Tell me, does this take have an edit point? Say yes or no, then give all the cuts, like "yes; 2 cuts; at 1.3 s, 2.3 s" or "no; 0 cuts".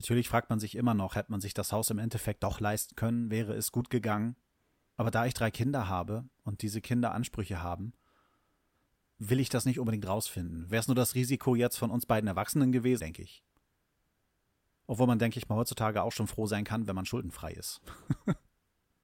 yes; 1 cut; at 13.0 s